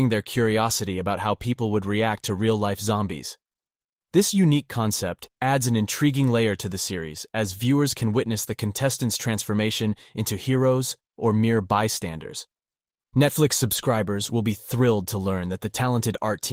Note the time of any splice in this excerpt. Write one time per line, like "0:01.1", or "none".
0:11.1